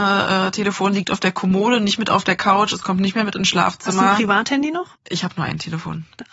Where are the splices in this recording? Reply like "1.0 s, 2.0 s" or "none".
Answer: 5.0 s